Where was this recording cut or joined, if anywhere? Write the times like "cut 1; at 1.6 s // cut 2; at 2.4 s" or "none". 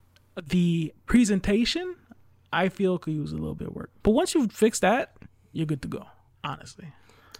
cut 1; at 4.0 s